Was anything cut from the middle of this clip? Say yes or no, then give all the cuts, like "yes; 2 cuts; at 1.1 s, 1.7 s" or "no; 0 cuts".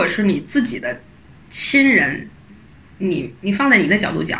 no; 0 cuts